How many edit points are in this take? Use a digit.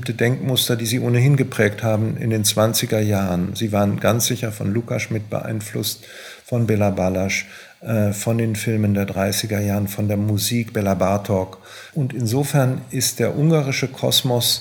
1